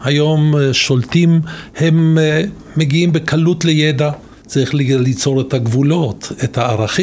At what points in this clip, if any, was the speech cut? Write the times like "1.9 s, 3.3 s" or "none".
4.4 s